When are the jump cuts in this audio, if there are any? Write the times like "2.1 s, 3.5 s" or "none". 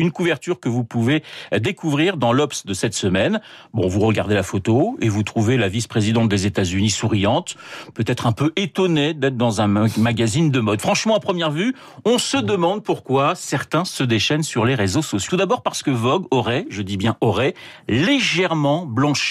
15.3 s